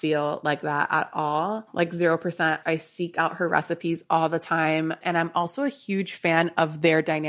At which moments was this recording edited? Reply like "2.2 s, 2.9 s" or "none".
2.6 s, 5.0 s